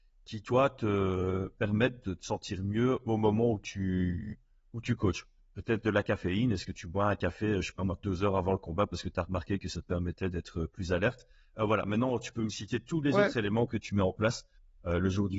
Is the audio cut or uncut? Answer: uncut